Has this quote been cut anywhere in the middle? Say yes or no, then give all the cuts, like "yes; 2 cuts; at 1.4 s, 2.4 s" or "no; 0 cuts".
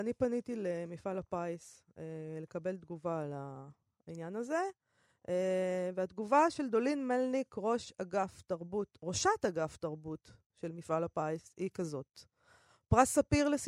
no; 0 cuts